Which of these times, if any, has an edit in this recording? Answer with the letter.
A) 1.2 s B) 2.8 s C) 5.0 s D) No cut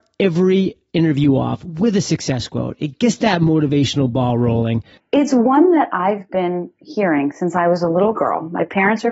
C